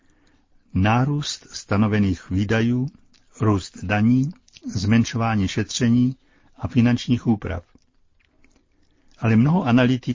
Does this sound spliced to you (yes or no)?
no